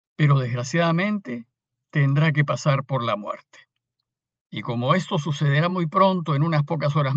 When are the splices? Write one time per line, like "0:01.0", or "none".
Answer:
none